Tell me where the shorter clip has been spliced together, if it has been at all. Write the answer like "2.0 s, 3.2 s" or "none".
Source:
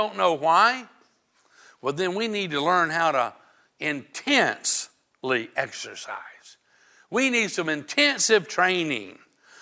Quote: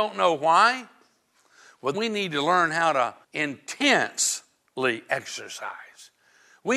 1.9 s, 3.2 s

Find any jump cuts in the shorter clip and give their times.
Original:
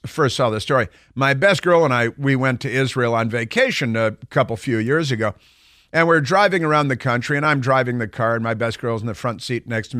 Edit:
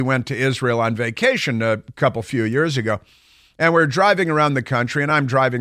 none

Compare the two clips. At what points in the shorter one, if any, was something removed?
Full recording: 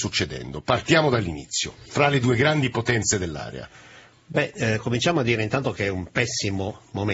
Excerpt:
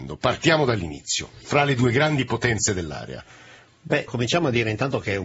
4.1 s

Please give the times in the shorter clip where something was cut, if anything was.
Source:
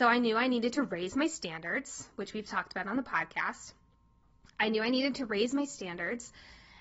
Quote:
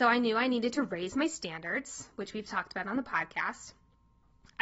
none

